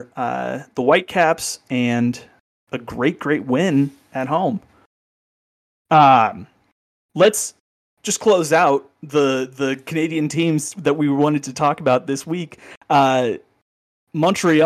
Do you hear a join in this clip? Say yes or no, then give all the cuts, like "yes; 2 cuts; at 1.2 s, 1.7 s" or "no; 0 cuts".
no; 0 cuts